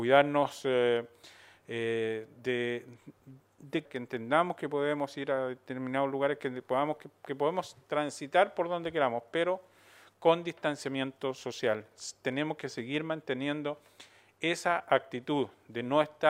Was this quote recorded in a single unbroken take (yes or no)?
no